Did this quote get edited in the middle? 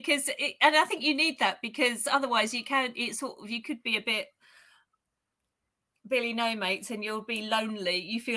no; 0 cuts

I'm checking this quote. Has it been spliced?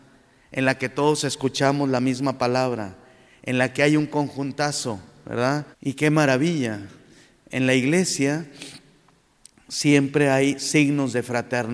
yes; 1 cut; at 5.7 s

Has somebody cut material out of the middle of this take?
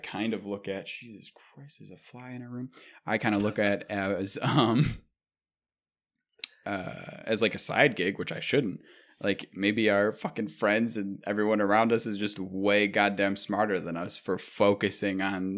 no; 0 cuts

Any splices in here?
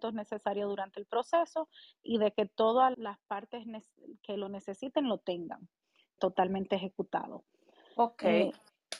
yes; 2 cuts; at 2.9 s, 6.2 s

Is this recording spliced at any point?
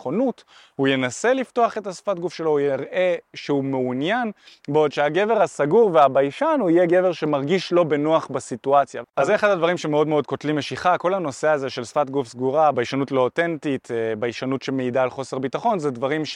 yes; 2 cuts; at 9.0 s, 12.7 s

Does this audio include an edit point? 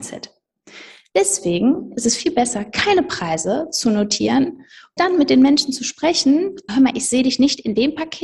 yes; 2 cuts; at 5.0 s, 6.7 s

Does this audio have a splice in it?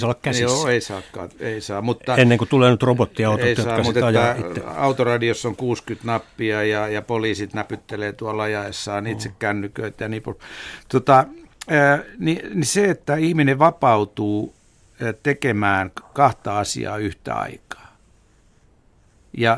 no; 0 cuts

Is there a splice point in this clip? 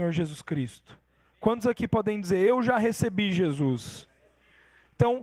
no; 0 cuts

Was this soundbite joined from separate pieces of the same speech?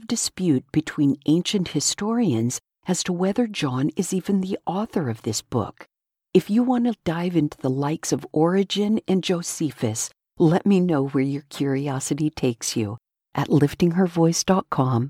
no; 0 cuts

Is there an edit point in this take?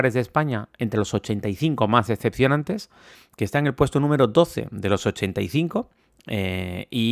yes; 1 cut; at 3.1 s

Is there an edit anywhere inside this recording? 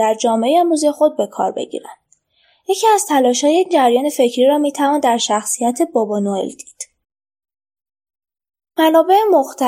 no; 0 cuts

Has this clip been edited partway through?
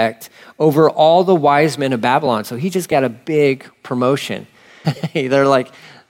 yes; 1 cut; at 4.8 s

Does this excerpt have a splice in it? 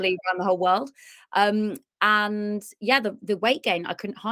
no; 0 cuts

